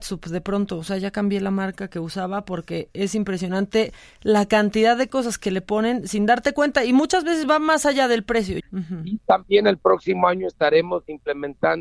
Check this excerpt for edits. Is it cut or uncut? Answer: cut